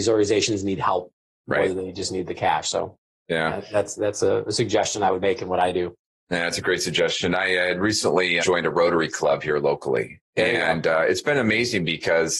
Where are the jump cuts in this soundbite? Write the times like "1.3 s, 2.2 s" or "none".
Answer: 8.4 s